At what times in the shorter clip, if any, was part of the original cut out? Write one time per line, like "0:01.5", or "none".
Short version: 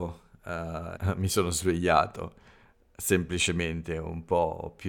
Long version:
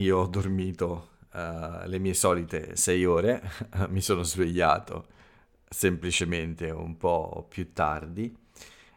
0:01.0